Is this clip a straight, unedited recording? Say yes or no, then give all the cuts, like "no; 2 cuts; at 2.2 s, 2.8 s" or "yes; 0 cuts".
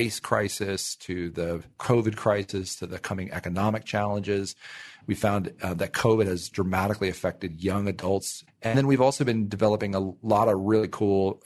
no; 2 cuts; at 5.0 s, 8.5 s